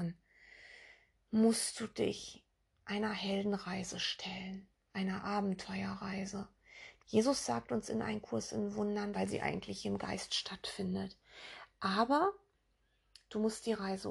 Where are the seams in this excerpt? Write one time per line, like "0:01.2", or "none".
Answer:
0:07.0
0:09.1